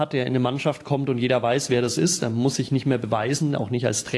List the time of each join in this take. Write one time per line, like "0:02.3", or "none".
none

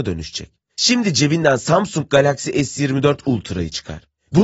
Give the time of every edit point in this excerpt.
none

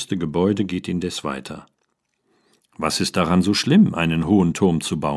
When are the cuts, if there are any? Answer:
0:02.6

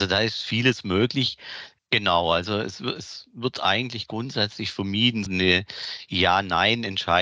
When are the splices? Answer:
0:01.8
0:05.3

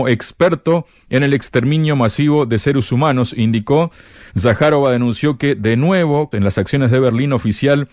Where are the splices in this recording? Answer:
0:04.3
0:06.3

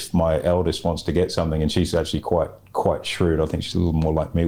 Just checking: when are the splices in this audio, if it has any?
none

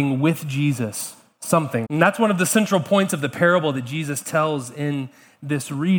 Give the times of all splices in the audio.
0:01.8

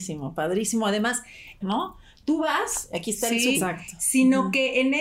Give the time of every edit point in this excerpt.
0:01.6
0:03.5

